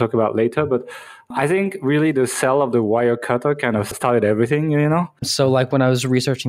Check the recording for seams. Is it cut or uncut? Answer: cut